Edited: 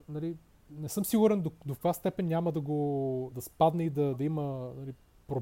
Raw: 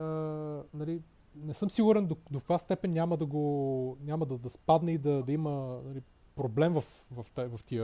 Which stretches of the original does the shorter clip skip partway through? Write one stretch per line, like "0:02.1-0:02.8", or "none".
0:04.0-0:04.4

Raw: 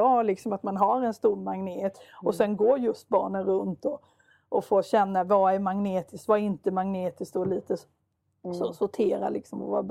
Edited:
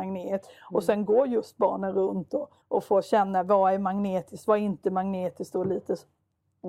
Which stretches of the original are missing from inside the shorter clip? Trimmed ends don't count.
0:04.1-0:04.4

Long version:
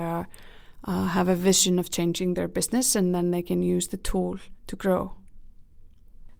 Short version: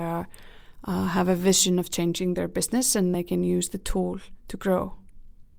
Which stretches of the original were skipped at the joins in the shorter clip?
0:03.1-0:03.3

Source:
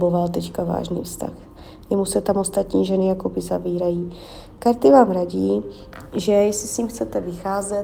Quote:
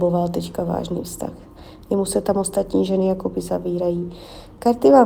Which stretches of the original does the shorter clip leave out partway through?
none

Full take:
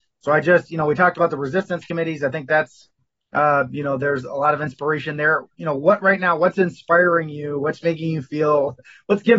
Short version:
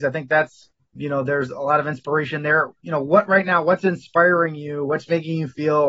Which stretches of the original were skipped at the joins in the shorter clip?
0:03.1-0:03.7

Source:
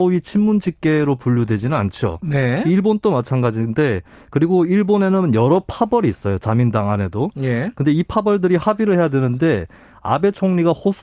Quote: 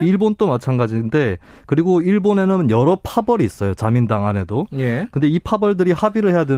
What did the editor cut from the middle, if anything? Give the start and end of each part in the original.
none

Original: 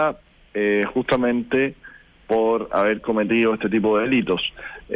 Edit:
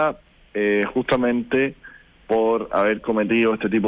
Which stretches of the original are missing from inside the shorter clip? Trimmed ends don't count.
none

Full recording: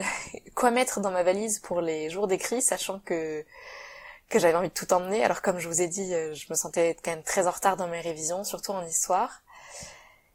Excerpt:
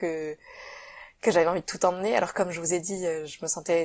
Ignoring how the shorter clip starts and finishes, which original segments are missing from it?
none

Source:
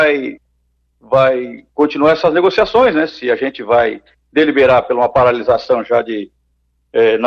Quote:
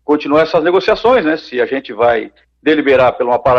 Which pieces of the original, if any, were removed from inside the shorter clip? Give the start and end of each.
none

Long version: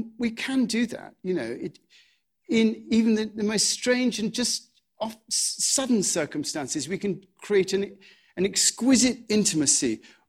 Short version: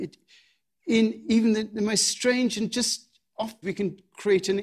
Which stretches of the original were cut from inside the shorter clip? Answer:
0:05.2-0:06.9

